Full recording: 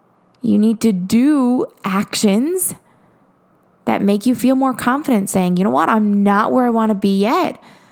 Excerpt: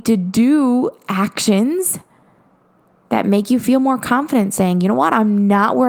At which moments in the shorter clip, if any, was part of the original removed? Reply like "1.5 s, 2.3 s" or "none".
none